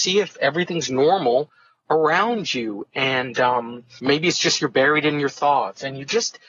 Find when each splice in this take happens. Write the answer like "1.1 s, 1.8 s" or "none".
none